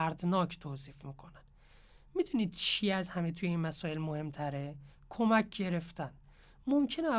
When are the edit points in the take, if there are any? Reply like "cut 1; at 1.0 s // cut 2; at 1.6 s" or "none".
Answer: none